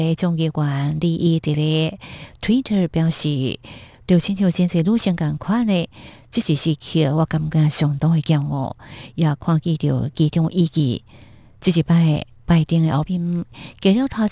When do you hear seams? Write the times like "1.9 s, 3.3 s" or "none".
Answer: 11.6 s, 13.0 s

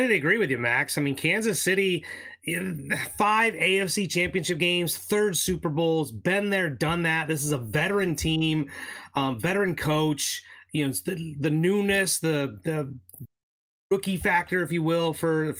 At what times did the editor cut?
none

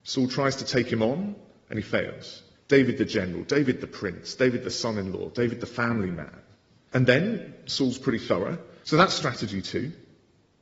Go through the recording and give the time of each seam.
2.6 s, 6.9 s, 8.8 s

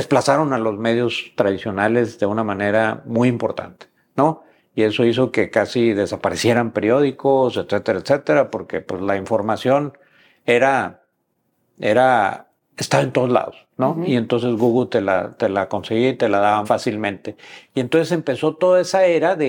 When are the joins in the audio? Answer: 16.6 s

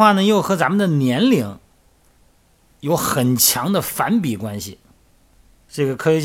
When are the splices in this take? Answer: none

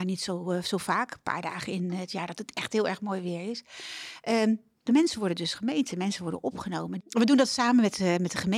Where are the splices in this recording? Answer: 4.8 s, 7.0 s

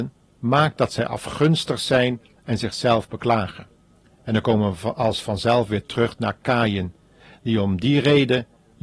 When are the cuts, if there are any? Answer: none

